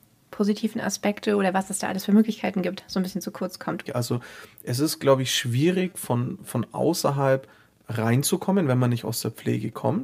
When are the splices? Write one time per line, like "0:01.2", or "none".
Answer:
0:03.9